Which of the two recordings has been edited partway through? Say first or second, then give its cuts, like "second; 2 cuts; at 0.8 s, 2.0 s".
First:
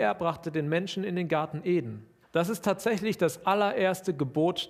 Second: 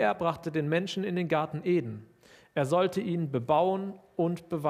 first; 1 cut; at 2.2 s